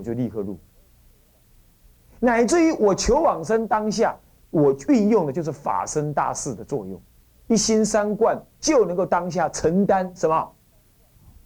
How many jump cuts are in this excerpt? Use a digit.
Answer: 1